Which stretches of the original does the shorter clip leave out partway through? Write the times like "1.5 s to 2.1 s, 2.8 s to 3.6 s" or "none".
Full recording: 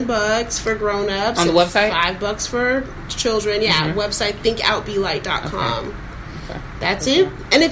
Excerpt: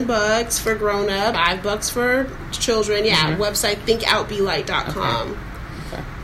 1.3 s to 1.9 s